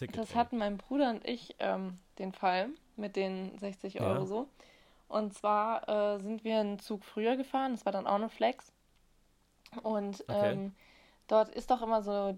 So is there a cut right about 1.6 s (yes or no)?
no